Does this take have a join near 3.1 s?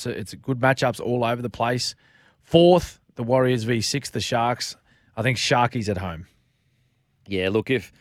no; 0 cuts

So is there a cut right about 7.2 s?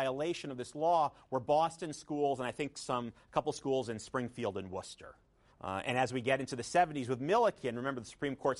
no; 1 cut; at 5.5 s

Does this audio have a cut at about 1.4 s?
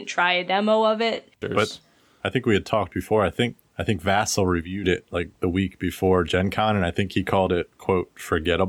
yes; 1 cut; at 1.4 s

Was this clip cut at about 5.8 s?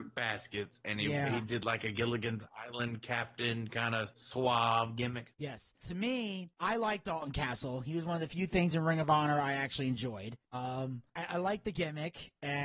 yes; 2 cuts; at 5.8 s, 11.1 s

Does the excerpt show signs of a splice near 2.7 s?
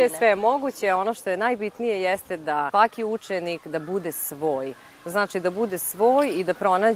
yes; 1 cut; at 2.7 s

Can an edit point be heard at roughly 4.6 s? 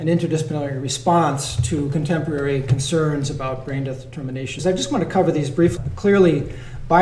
yes; 2 cuts; at 4.6 s, 5.8 s

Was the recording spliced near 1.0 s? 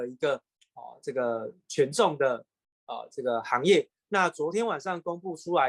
no; 1 cut; at 4.0 s

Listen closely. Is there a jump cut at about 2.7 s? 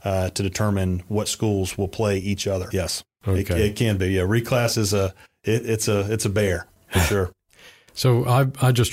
yes; 1 cut; at 2.7 s

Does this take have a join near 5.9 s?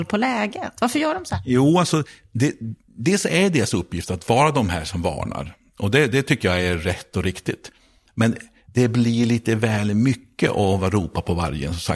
no; 0 cuts

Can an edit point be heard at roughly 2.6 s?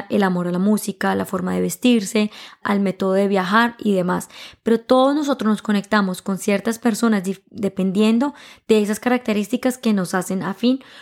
yes; 1 cut; at 2.6 s

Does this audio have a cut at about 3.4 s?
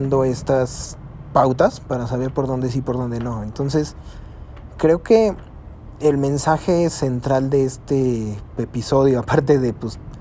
no; 0 cuts

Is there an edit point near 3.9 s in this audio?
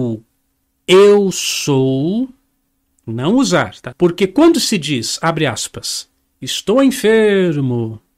yes; 1 cut; at 3.9 s

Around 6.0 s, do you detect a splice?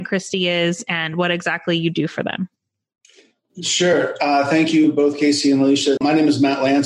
yes; 1 cut; at 6.0 s

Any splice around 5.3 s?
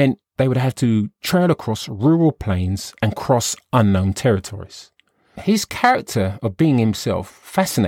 yes; 1 cut; at 5.3 s

